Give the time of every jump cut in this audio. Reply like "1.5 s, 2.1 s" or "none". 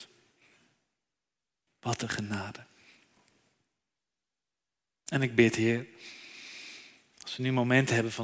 1.7 s